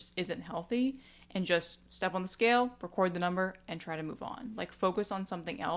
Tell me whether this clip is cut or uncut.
uncut